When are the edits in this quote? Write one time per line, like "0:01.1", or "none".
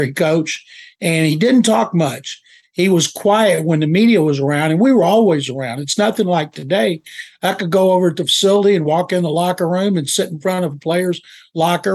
none